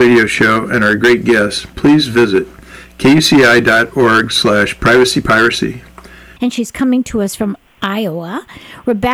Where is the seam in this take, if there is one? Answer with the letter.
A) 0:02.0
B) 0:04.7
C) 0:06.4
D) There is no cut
C